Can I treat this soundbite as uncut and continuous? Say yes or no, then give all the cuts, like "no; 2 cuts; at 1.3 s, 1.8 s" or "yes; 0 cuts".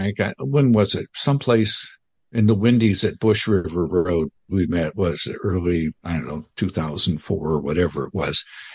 no; 1 cut; at 6.0 s